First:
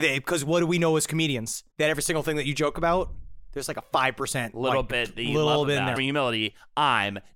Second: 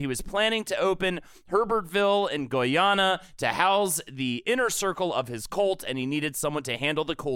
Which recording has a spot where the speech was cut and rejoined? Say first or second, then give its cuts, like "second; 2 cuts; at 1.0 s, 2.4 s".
first; 2 cuts; at 1.7 s, 6.0 s